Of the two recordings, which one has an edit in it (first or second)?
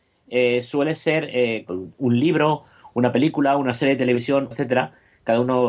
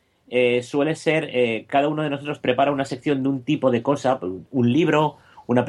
first